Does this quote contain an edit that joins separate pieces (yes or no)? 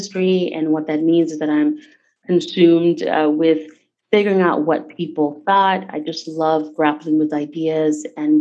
no